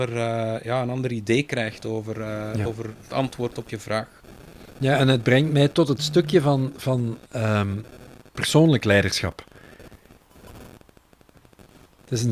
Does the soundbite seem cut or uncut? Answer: uncut